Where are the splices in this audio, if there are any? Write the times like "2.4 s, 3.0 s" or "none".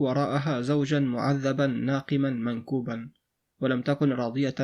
none